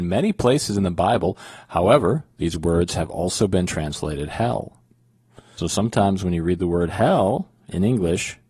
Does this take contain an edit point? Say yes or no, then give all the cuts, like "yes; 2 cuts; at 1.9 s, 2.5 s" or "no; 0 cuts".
yes; 1 cut; at 5.6 s